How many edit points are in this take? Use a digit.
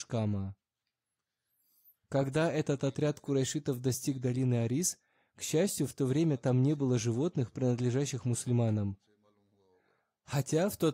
0